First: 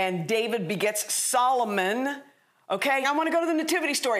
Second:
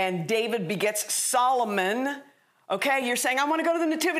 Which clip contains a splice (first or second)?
first